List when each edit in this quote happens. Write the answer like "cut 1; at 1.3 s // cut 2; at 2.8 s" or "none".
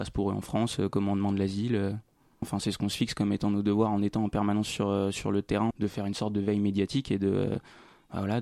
cut 1; at 2.4 s // cut 2; at 5.7 s